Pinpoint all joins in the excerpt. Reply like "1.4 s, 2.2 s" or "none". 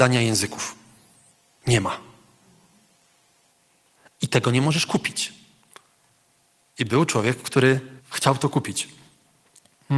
8.0 s